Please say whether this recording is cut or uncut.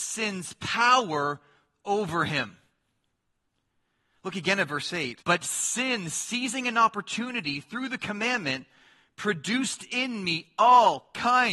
cut